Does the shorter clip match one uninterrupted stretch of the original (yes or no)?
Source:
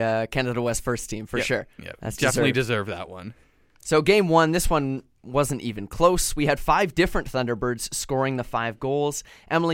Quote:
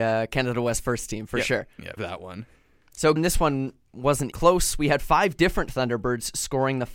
no